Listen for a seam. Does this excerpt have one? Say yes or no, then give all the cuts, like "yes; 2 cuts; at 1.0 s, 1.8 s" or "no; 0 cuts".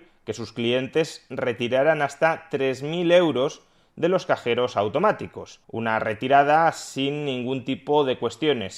yes; 1 cut; at 5.6 s